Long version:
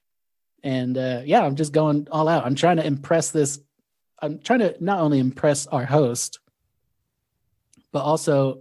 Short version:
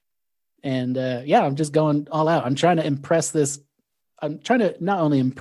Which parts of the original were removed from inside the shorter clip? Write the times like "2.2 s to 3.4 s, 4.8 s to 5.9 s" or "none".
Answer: none